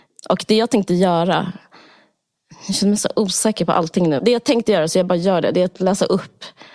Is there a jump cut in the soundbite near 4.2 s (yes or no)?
yes